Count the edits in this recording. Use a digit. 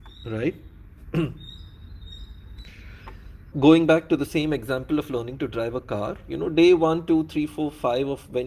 1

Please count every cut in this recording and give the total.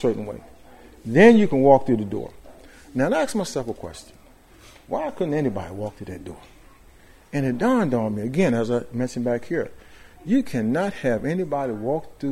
0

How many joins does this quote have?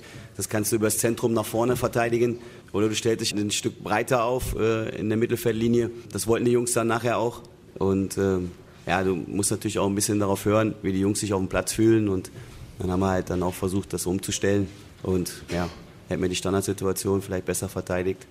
1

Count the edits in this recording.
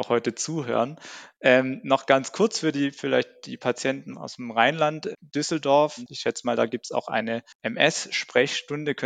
2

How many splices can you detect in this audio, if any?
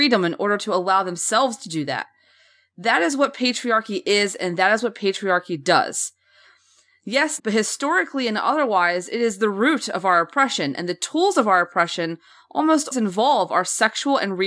2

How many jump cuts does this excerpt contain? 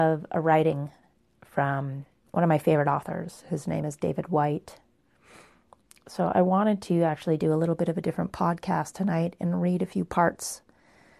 0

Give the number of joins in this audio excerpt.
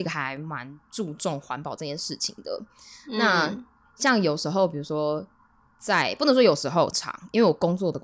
1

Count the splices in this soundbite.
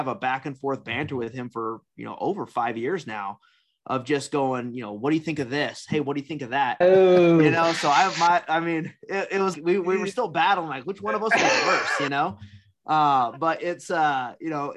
2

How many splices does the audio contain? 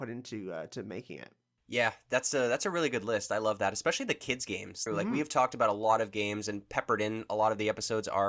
1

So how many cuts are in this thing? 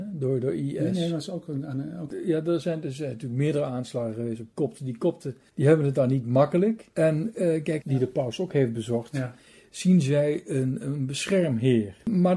1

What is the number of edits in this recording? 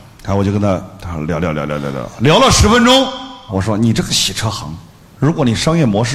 1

